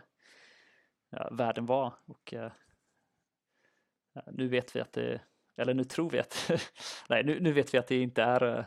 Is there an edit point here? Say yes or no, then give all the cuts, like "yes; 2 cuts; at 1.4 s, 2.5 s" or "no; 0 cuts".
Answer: no; 0 cuts